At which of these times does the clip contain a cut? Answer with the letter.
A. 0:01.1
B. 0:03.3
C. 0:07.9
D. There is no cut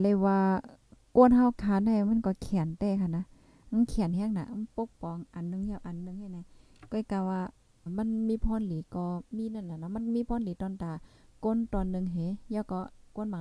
C